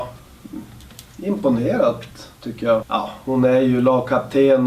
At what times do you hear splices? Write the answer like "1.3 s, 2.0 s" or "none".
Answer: 2.8 s